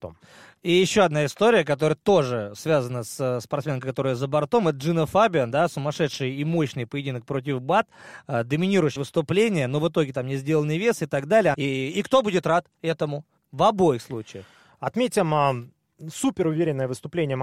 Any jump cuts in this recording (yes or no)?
yes